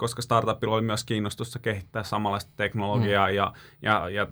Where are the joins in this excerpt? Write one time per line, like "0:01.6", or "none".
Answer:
none